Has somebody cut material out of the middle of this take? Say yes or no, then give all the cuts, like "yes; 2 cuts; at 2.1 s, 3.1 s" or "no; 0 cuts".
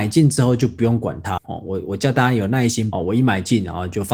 yes; 2 cuts; at 1.4 s, 2.9 s